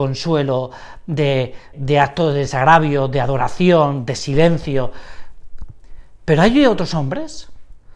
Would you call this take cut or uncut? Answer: cut